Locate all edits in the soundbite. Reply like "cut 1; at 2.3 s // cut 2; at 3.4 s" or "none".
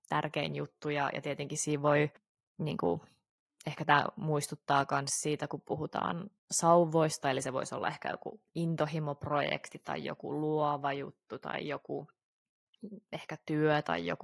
cut 1; at 6.4 s